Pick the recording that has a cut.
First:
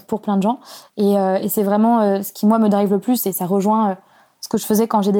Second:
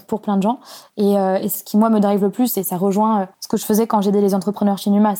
second; 2 cuts; at 1.6 s, 3.3 s

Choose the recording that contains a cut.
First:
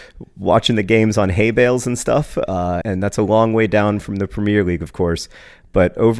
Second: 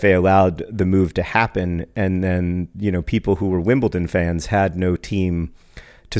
first; 1 cut; at 2.8 s

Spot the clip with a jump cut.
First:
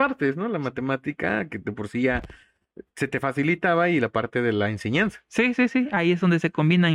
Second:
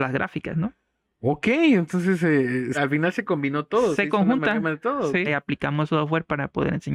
second; 2 cuts; at 2.7 s, 5.3 s

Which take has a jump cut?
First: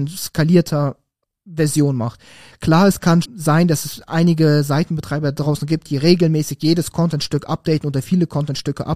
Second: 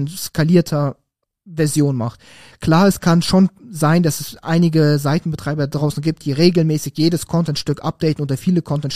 first; 1 cut; at 3.2 s

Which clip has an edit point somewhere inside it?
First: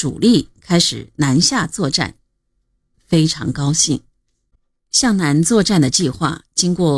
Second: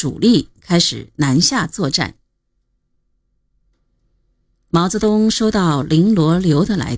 first; 1 cut; at 2.9 s

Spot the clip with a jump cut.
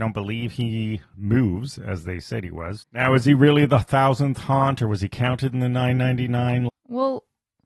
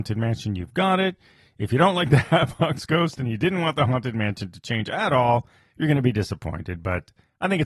first; 2 cuts; at 2.8 s, 6.7 s

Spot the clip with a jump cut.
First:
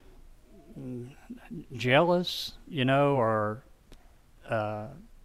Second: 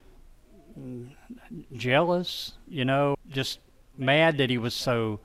second; 1 cut; at 3.1 s

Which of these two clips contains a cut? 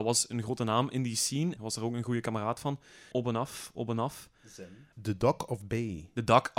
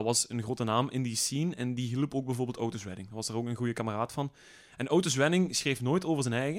first; 3 cuts; at 1.6 s, 3.1 s, 4.9 s

